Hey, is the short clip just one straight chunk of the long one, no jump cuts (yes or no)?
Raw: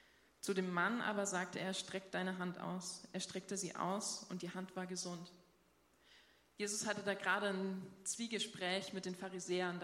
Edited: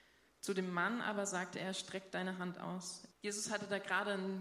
no